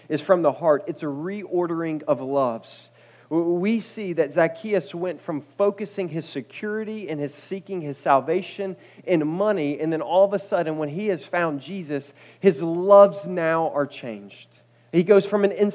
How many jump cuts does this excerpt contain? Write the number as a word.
zero